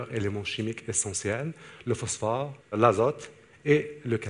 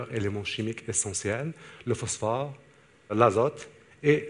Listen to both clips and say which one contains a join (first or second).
first